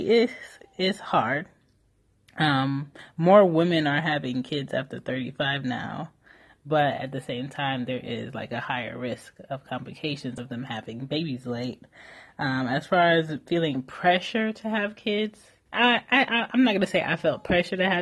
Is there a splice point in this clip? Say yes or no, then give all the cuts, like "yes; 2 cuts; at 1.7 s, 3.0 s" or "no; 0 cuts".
yes; 1 cut; at 15.7 s